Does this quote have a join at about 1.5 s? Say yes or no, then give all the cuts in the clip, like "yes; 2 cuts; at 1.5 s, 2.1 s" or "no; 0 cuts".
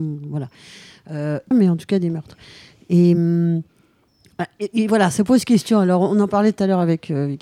yes; 1 cut; at 1.5 s